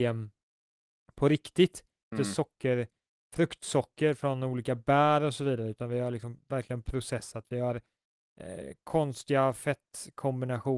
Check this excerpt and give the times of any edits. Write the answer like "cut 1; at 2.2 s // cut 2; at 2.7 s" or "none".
cut 1; at 2.1 s